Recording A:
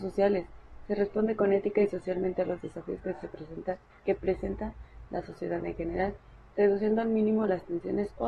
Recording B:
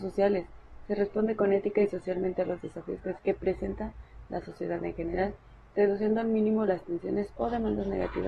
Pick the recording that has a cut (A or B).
B